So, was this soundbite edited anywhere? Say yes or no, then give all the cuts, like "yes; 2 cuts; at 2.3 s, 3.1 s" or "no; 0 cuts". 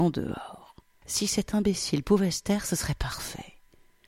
yes; 1 cut; at 1.0 s